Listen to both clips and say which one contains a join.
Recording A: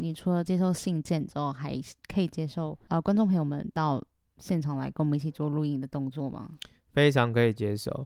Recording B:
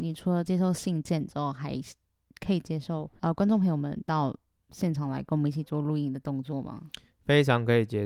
A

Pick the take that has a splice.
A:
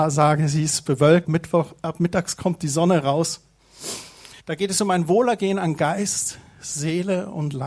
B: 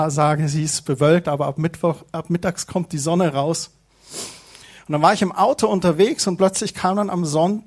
A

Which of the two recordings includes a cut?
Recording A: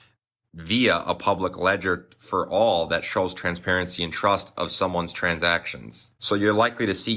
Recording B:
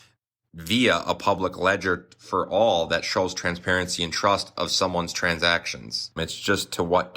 B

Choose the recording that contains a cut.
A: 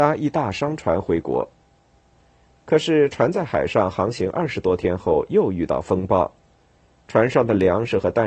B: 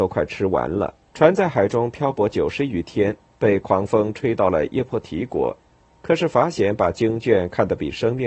B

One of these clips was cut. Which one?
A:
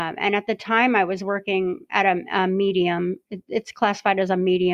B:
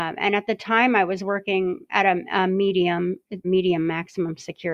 B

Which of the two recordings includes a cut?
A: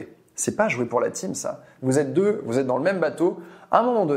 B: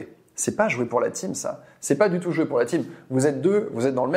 A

